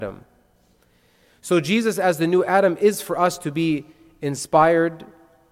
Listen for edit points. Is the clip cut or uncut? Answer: uncut